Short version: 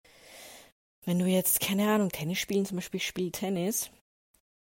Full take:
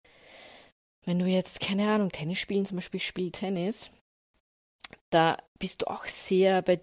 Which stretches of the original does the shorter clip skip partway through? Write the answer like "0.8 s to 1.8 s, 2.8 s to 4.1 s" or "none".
none